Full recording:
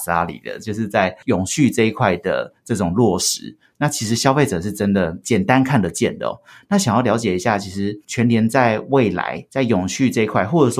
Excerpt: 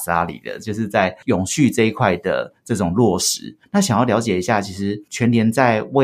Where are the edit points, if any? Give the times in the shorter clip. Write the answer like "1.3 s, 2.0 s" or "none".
3.6 s